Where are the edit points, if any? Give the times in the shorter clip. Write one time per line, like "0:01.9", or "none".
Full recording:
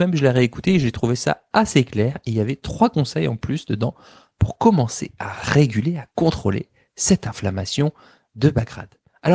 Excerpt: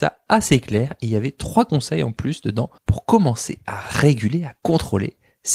0:02.8